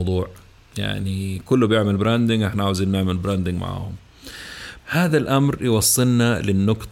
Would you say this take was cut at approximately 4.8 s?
yes; 1 cut; at 4.8 s

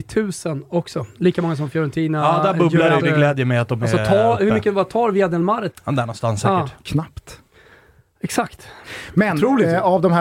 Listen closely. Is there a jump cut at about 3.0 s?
yes; 2 cuts; at 3.0 s, 5.7 s

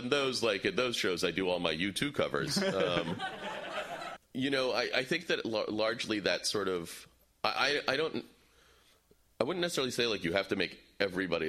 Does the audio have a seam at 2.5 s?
no; 1 cut; at 4.2 s

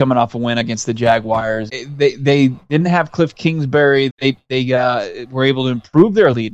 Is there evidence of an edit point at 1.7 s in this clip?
yes; 2 cuts; at 1.7 s, 4.1 s

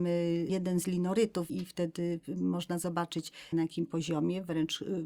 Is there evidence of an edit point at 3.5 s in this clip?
yes; 2 cuts; at 1.5 s, 3.5 s

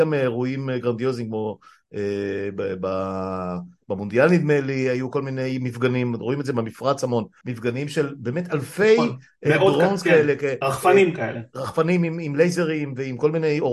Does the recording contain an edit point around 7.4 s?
yes; 1 cut; at 7.4 s

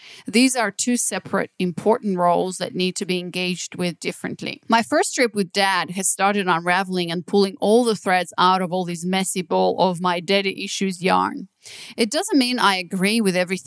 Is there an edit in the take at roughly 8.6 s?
no; 2 cuts; at 4.6 s, 11.9 s

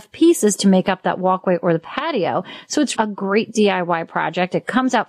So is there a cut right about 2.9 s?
yes; 1 cut; at 2.9 s

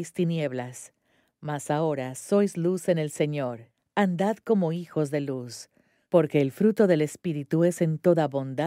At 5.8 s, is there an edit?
no; 0 cuts

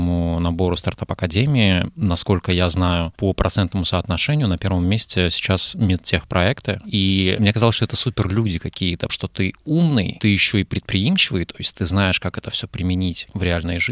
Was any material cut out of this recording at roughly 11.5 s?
no; 2 cuts; at 6.8 s, 9.1 s

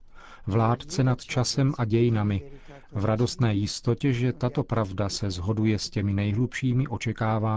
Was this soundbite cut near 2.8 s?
no; 0 cuts

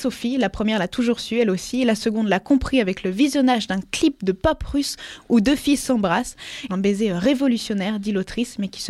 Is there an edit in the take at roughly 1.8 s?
no; 1 cut; at 6.7 s

